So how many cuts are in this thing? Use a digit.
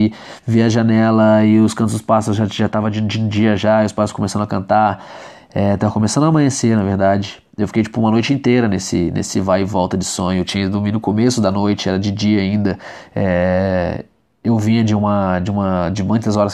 0